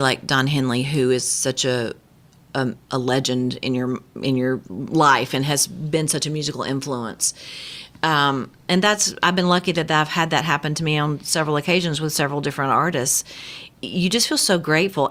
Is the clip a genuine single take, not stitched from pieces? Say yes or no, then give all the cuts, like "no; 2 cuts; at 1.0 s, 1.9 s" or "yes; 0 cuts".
no; 1 cut; at 13.8 s